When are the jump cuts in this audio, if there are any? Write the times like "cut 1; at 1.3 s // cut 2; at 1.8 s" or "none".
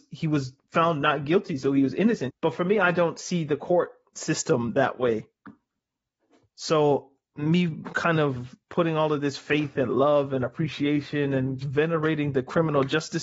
cut 1; at 2.3 s // cut 2; at 6.4 s // cut 3; at 11.6 s